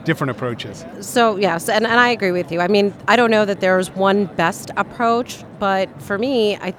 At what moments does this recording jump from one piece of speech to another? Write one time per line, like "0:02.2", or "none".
none

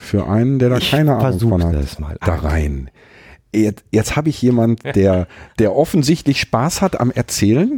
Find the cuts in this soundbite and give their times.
0:02.2

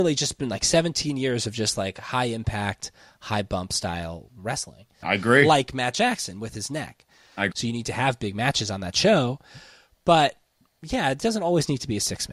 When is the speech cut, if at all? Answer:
0:05.0
0:07.5

